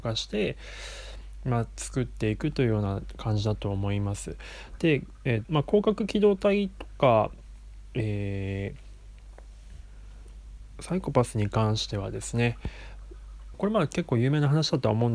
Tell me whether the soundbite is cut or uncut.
cut